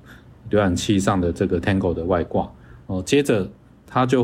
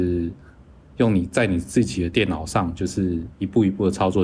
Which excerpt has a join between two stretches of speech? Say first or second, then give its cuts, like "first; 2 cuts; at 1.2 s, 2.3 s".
first; 1 cut; at 2.8 s